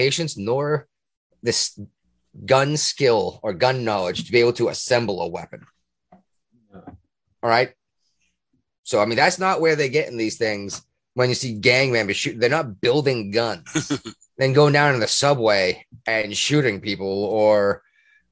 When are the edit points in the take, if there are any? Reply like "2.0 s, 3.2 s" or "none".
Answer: 14.3 s